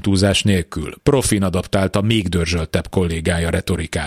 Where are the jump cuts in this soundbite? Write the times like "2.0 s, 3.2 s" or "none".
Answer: none